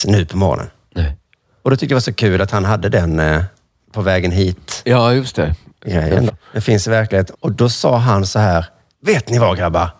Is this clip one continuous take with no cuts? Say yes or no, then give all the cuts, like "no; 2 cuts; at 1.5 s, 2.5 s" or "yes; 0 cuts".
no; 2 cuts; at 6.3 s, 7.3 s